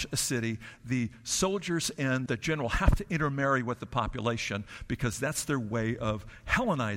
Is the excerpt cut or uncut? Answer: cut